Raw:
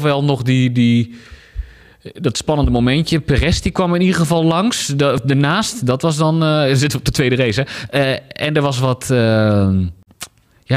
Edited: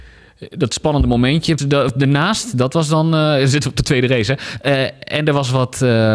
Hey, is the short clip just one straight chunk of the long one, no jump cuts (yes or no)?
no